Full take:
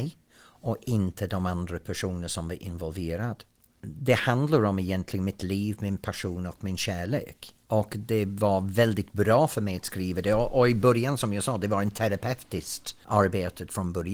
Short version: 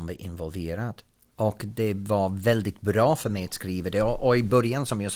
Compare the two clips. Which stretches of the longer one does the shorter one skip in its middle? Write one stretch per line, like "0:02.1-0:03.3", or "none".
0:03.7-0:07.6